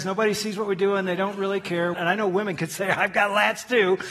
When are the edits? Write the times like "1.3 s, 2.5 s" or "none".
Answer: 1.9 s